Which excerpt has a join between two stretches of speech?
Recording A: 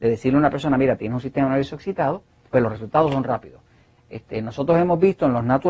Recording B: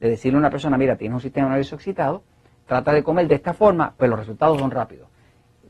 A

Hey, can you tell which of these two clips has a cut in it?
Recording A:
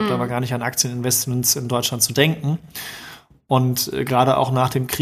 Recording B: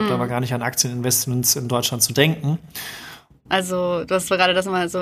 B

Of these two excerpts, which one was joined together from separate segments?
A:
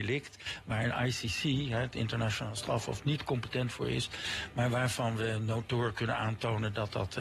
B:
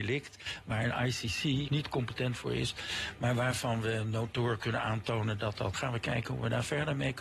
B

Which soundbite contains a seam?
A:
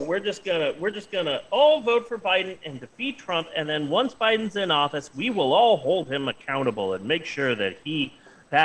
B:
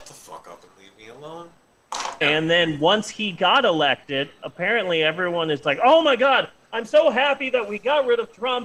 B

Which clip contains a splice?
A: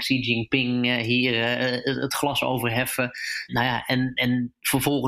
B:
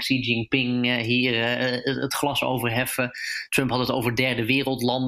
A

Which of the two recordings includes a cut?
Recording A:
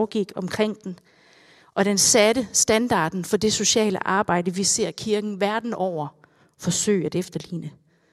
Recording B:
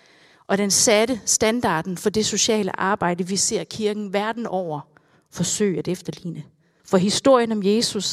B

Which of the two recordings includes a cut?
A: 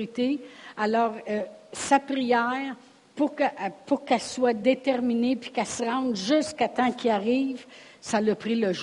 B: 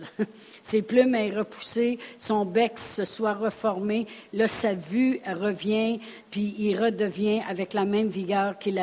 B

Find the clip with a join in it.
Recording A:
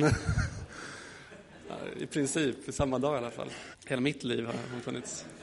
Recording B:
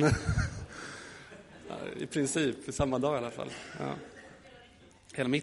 A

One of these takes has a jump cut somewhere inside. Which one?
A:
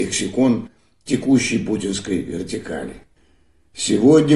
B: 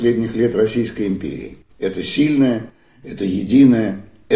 B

